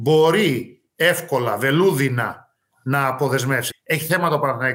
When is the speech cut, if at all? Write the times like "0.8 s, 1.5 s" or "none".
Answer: 3.7 s